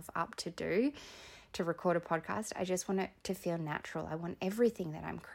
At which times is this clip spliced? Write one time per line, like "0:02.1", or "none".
none